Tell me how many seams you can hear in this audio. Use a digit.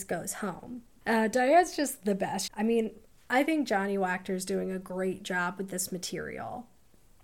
2